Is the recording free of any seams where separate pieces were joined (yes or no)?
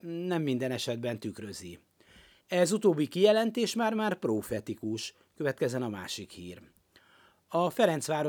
yes